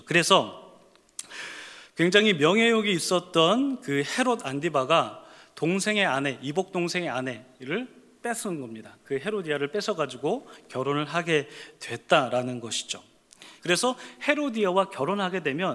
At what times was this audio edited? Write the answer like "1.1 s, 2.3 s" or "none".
13.6 s

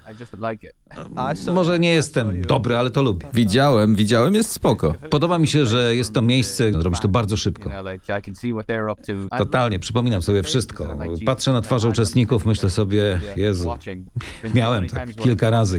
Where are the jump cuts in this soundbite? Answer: 5.1 s, 6.7 s, 9.3 s

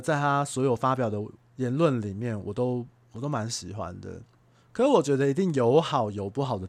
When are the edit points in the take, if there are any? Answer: none

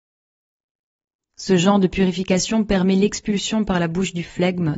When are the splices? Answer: none

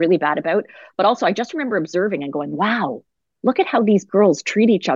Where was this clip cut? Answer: none

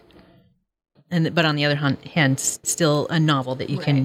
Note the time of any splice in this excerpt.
1.0 s, 2.6 s

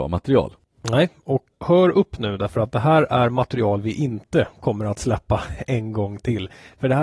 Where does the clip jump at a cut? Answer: 1.5 s

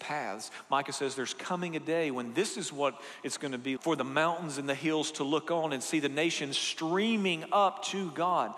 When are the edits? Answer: 3.8 s

